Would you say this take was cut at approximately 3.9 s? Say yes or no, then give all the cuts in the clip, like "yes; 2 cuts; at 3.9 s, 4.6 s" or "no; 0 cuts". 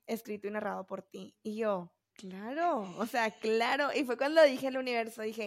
no; 1 cut; at 2.0 s